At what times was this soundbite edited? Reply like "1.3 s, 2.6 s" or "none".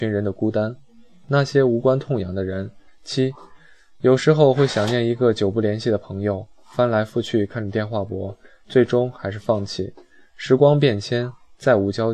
2.9 s